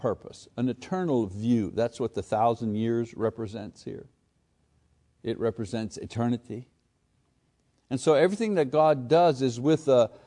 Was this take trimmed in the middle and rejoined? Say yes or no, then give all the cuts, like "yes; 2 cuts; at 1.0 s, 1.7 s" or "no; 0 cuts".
no; 0 cuts